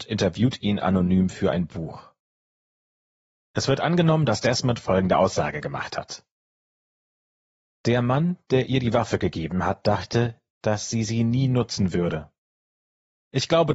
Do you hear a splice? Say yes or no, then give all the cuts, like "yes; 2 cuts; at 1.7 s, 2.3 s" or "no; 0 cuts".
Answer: no; 0 cuts